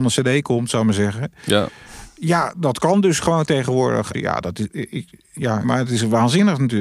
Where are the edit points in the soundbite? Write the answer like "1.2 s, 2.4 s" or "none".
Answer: 4.1 s, 5.6 s